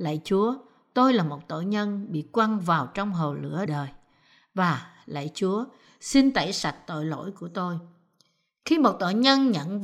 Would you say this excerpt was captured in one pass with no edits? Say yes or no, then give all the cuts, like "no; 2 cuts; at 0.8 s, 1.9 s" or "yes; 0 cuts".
no; 1 cut; at 3.7 s